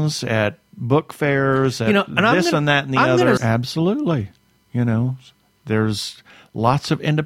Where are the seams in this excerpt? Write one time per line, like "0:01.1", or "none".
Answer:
0:03.4

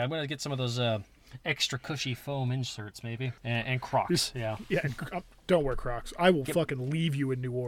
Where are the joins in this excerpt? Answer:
0:03.4

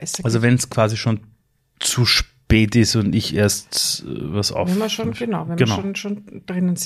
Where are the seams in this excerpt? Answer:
none

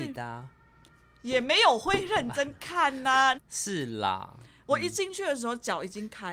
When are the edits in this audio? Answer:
0:03.3

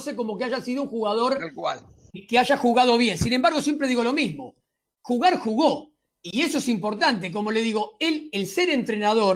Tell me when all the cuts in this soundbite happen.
none

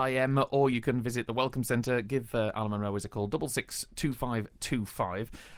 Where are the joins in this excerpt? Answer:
none

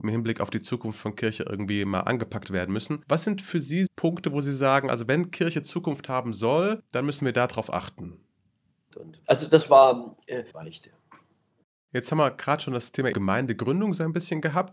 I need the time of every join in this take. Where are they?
0:03.9
0:08.9
0:10.5

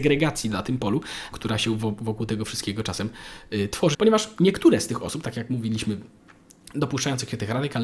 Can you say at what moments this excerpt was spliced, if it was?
0:01.3
0:03.9

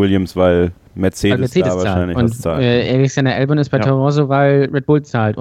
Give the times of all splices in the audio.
none

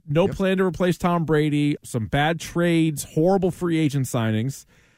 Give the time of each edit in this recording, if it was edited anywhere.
0:01.8

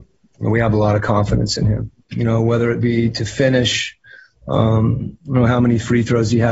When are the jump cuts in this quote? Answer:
0:02.0

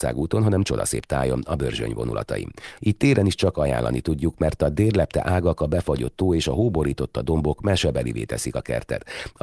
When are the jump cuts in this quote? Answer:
0:02.8

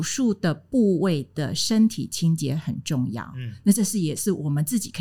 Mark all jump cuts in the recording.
none

